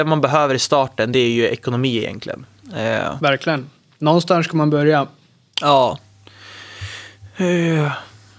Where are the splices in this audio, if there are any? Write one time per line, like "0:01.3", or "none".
0:02.6